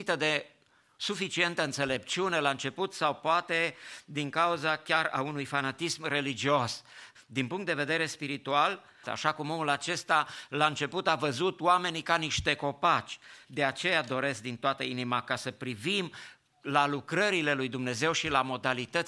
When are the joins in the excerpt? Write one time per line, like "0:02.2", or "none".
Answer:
0:07.1
0:09.0
0:13.4